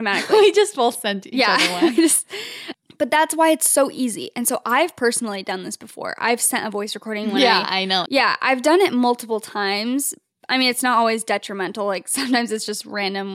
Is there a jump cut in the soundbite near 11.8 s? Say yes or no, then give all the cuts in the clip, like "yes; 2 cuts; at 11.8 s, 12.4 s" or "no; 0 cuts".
no; 1 cut; at 8.1 s